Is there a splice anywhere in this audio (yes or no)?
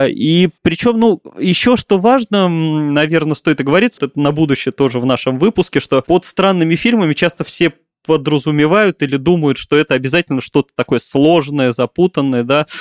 yes